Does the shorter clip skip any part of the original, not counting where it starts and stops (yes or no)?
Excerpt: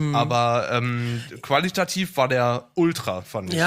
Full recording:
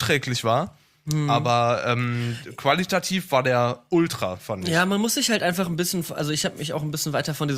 no